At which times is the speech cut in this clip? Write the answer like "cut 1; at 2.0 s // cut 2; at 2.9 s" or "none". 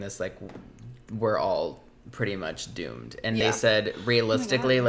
none